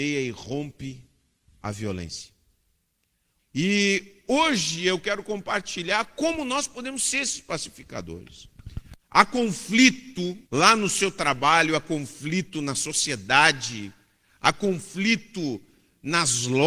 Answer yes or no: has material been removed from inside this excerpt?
yes